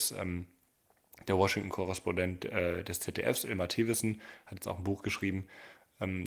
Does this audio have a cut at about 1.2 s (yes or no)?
no